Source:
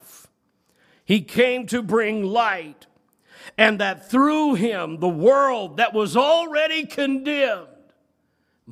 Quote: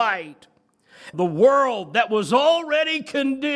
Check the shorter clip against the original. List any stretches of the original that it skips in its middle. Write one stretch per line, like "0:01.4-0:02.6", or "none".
0:03.5-0:05.0